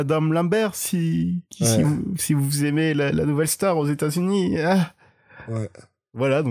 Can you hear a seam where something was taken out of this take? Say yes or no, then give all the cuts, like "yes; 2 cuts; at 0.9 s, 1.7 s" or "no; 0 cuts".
no; 0 cuts